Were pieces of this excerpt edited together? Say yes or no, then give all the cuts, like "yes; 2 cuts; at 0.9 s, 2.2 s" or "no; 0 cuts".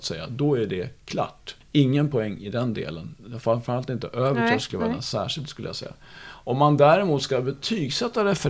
yes; 1 cut; at 1.6 s